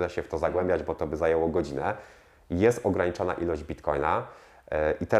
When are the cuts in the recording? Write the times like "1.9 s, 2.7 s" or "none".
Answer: none